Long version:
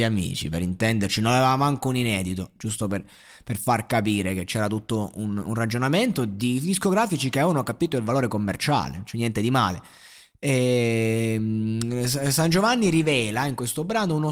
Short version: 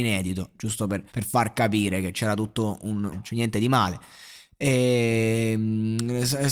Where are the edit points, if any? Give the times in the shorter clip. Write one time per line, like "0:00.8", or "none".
0:01.1
0:03.1